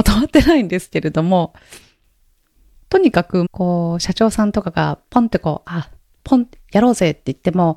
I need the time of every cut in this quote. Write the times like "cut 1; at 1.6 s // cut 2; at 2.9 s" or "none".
cut 1; at 3.4 s // cut 2; at 6.2 s